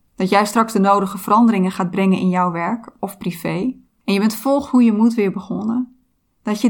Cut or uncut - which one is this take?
cut